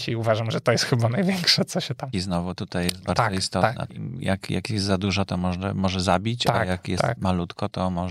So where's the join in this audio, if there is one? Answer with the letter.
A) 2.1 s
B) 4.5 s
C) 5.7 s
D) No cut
A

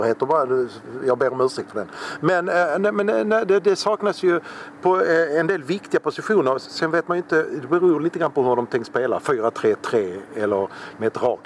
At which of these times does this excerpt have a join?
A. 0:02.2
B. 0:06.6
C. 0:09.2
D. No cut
D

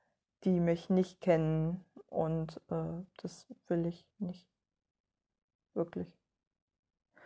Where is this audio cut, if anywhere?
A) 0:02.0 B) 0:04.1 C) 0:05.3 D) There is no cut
B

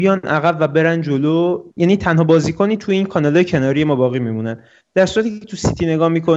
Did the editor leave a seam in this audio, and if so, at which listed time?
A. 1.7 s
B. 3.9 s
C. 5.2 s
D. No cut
A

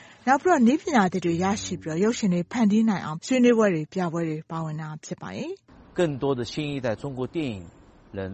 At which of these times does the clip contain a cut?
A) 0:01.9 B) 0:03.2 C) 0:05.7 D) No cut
B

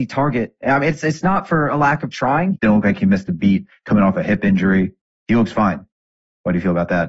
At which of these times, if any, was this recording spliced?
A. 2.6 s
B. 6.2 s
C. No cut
A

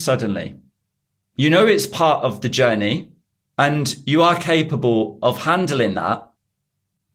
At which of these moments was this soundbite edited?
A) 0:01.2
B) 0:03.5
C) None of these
A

